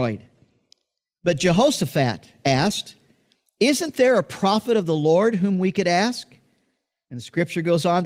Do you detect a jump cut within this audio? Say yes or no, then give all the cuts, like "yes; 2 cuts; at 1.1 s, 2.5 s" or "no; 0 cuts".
no; 0 cuts